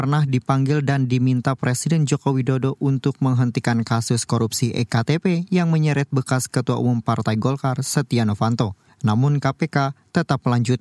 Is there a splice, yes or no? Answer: no